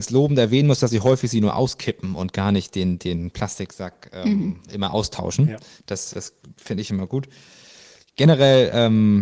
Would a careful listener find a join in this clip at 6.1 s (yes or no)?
yes